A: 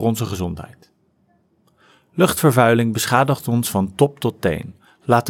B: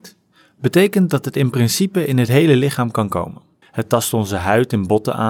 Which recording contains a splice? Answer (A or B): B